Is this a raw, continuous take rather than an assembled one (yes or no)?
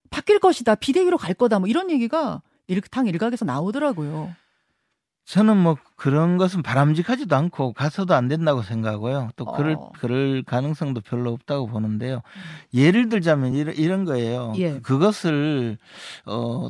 yes